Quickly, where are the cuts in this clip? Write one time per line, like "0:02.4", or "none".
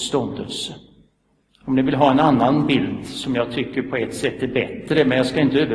0:01.5